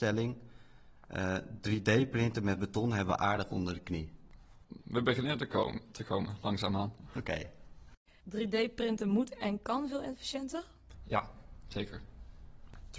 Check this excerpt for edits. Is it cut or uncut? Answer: cut